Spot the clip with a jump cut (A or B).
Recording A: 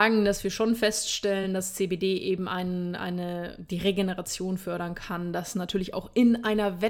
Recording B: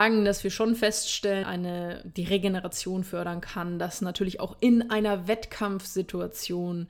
B